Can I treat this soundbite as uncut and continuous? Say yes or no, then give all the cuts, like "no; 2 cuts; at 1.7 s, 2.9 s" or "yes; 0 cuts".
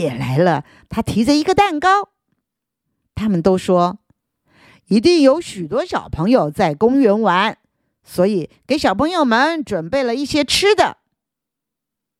yes; 0 cuts